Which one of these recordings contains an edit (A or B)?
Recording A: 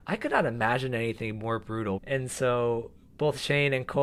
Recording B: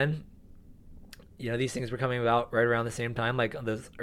A